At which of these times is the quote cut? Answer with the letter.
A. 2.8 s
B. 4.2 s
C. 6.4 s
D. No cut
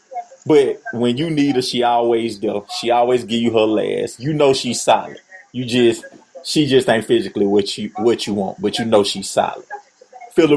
D